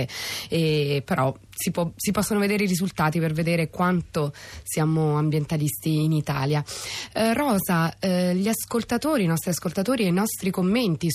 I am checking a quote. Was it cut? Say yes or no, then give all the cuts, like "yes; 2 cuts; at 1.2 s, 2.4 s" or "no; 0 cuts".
no; 0 cuts